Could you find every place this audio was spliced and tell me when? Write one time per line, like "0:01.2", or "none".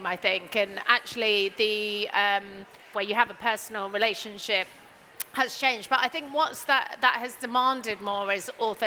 0:02.9